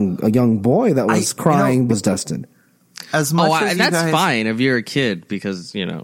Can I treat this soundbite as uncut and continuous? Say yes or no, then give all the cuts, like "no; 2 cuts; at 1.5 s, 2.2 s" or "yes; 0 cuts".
no; 1 cut; at 1.9 s